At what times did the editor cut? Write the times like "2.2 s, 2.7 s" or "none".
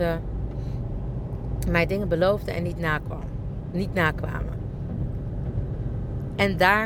none